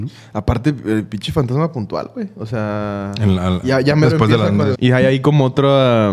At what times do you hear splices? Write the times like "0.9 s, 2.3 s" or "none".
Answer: 3.6 s, 4.7 s

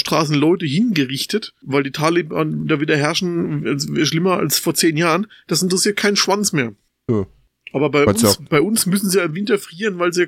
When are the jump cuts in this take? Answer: none

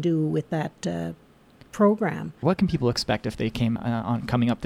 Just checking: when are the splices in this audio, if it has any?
2.4 s, 3.8 s

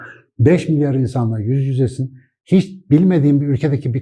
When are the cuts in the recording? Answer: none

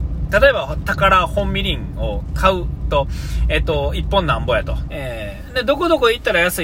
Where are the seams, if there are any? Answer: 4.9 s

